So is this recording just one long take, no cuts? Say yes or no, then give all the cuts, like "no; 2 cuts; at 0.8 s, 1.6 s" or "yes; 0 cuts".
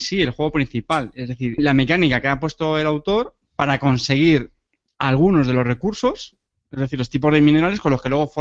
no; 1 cut; at 1.6 s